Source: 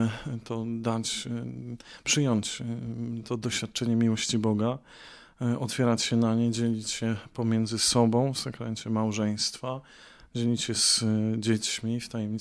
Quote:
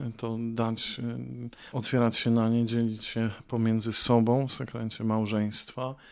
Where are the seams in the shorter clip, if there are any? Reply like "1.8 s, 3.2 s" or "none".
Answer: 1.7 s

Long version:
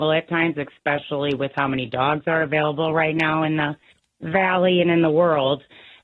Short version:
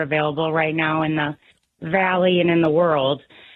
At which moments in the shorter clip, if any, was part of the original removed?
none

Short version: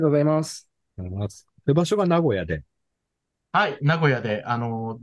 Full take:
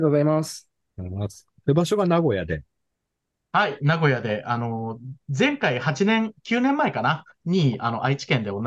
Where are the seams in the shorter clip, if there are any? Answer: none

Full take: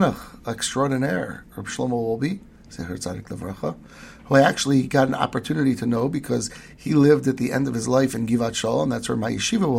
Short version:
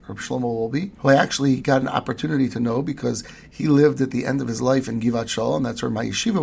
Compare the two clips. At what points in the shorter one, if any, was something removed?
1.0 s

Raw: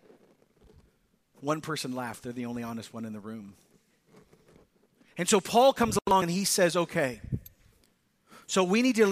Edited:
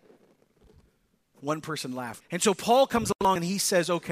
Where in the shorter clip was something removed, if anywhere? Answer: 2.2 s

